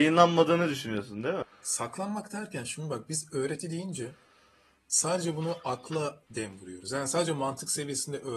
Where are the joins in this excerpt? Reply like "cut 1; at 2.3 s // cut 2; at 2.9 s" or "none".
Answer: cut 1; at 1.4 s // cut 2; at 6.3 s